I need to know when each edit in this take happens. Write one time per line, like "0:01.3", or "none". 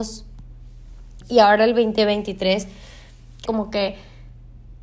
0:01.2
0:03.5